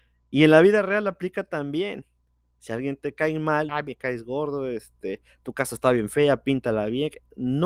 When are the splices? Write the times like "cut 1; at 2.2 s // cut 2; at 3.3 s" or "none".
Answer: cut 1; at 3.7 s